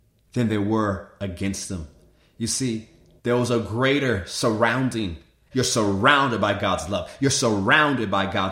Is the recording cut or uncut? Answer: cut